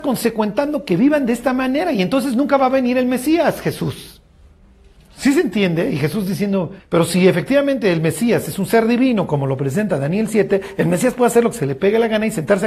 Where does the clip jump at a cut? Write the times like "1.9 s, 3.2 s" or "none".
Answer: 6.8 s